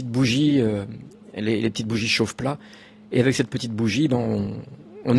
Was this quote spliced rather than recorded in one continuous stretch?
no; 0 cuts

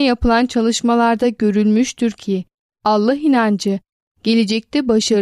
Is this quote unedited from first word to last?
yes; 0 cuts

